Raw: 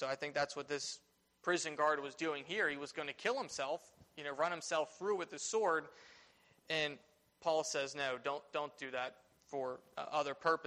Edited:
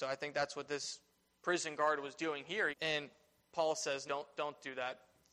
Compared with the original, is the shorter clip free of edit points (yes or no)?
no